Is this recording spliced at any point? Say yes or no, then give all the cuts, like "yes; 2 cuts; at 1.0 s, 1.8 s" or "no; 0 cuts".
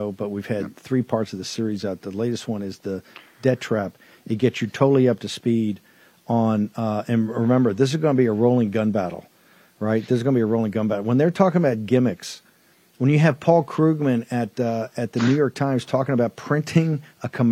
no; 0 cuts